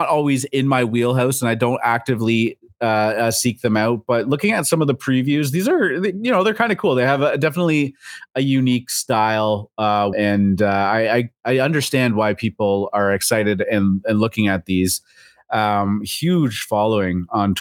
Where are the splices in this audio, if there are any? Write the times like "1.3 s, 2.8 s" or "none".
10.1 s

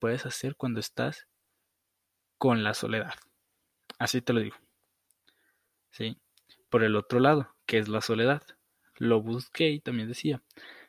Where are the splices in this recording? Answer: none

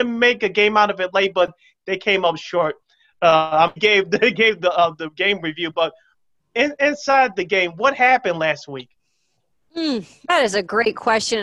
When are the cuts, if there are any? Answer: 3.8 s

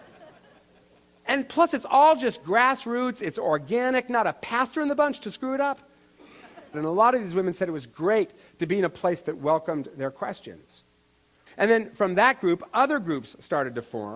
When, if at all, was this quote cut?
6.7 s, 11.5 s

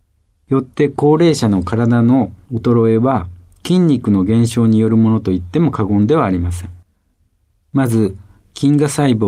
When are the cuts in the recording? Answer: 7.5 s

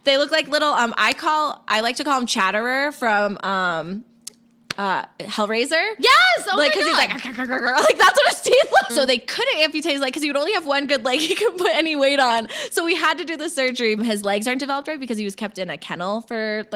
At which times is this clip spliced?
8.9 s, 14.0 s

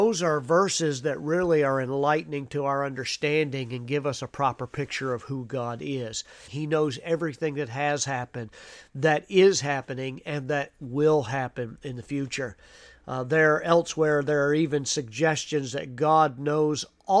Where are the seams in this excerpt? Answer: 6.5 s

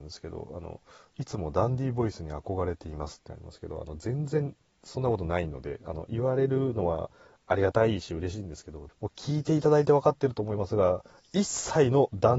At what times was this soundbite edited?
8.9 s

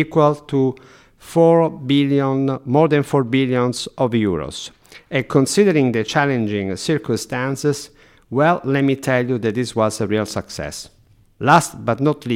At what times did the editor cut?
11.3 s

